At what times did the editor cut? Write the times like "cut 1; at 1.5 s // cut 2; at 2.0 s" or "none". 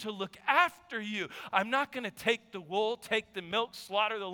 cut 1; at 1.5 s